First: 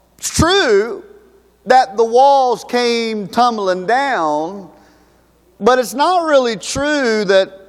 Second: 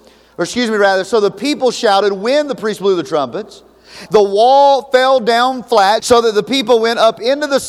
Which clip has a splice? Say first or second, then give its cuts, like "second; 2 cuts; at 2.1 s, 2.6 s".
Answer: second; 2 cuts; at 4.1 s, 6.0 s